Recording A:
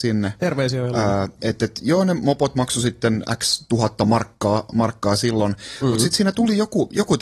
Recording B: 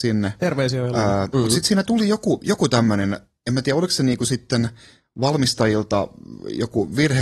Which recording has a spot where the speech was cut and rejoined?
B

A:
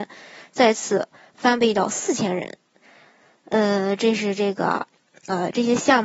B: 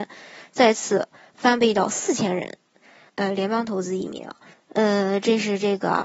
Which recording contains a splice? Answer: B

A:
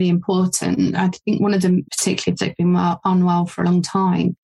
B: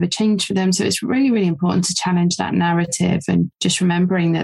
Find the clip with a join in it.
A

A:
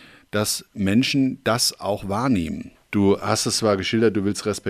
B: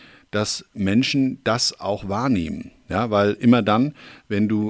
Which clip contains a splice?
A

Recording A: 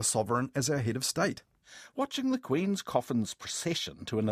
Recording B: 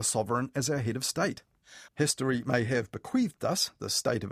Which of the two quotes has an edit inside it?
B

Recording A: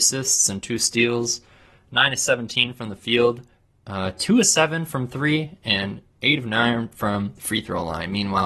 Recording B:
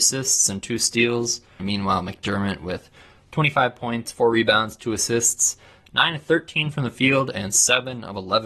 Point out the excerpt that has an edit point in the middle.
B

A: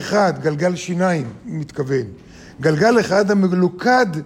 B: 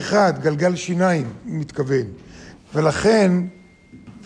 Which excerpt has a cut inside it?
B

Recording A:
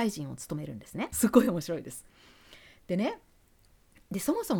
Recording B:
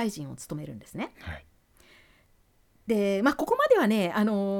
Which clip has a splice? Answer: A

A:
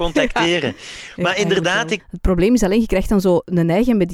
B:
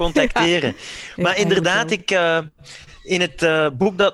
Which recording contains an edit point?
A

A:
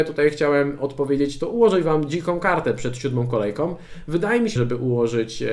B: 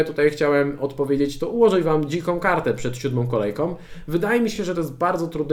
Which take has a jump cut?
A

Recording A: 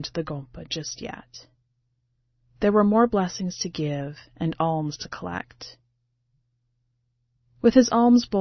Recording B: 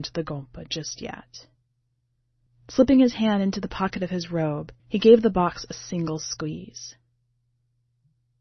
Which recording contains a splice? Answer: B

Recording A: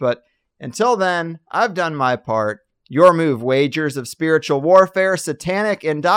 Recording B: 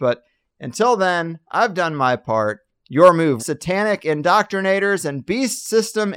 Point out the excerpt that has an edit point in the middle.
B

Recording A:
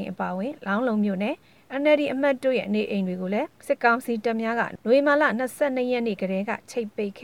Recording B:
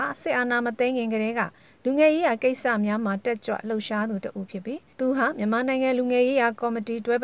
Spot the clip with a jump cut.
A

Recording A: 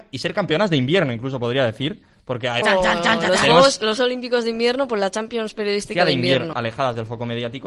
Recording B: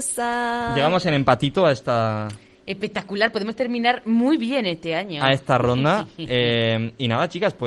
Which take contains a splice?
A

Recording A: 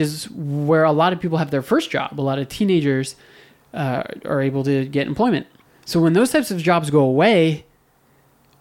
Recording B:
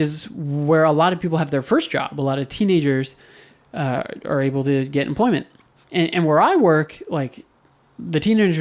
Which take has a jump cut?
A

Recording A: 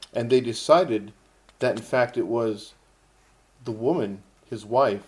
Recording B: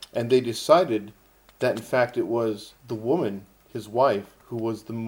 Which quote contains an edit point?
B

